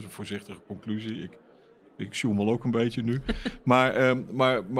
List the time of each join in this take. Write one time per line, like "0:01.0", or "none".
none